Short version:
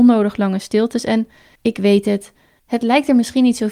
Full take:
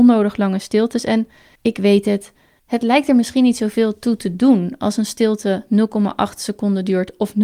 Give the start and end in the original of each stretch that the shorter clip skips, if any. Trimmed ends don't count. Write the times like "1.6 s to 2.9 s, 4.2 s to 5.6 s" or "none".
none